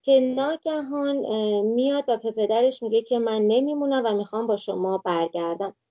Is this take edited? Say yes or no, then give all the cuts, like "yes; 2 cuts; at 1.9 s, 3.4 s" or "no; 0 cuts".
no; 0 cuts